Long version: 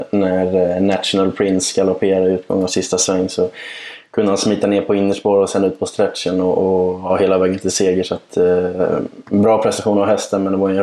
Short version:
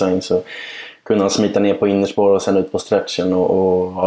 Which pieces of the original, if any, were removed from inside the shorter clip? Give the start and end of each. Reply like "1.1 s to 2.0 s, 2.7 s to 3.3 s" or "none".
none